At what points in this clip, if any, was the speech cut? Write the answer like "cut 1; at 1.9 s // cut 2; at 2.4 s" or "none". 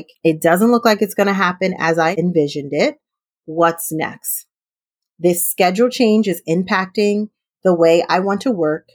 none

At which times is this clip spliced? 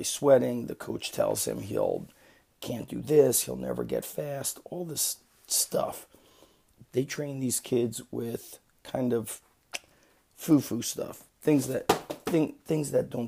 cut 1; at 6.9 s

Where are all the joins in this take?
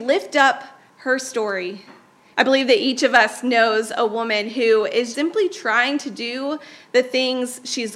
cut 1; at 2.3 s // cut 2; at 5.1 s

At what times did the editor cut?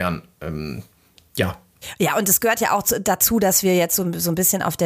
none

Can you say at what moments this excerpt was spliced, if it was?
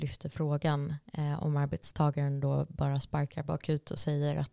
none

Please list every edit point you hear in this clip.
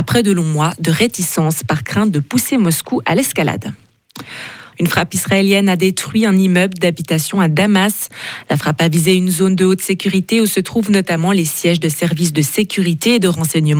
cut 1; at 4.7 s

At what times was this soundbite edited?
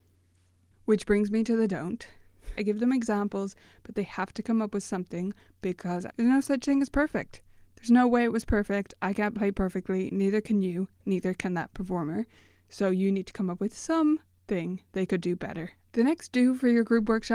cut 1; at 2.6 s // cut 2; at 6.1 s // cut 3; at 15.8 s

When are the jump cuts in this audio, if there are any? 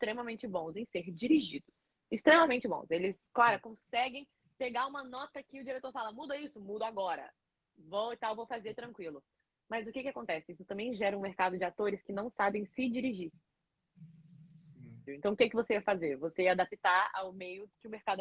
cut 1; at 15.1 s

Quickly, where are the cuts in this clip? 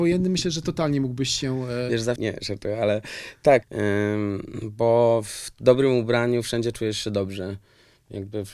cut 1; at 2.2 s // cut 2; at 3.6 s

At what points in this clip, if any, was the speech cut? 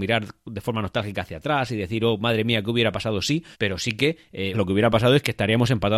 cut 1; at 3.5 s // cut 2; at 4.5 s

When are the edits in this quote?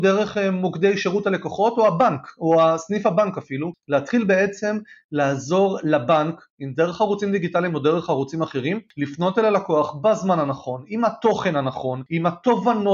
none

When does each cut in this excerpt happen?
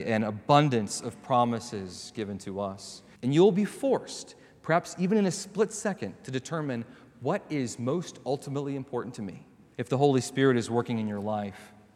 cut 1; at 3.1 s // cut 2; at 9.7 s

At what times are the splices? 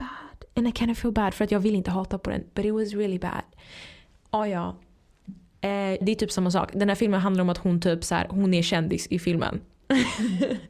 cut 1; at 6.0 s

